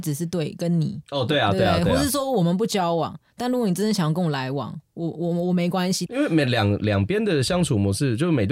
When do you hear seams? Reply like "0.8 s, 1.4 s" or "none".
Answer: 4.9 s, 6.1 s